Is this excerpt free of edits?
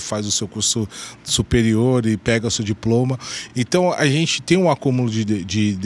yes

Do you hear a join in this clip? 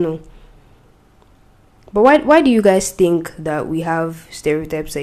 no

